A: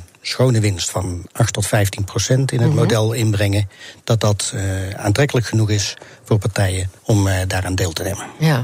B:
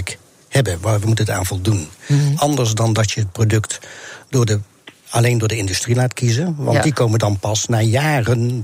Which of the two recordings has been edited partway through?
A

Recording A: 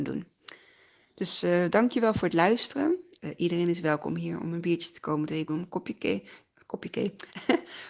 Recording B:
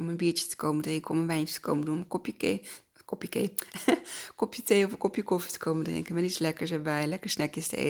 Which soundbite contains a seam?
A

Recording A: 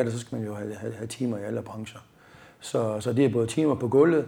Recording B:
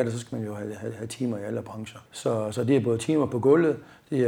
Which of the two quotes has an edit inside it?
B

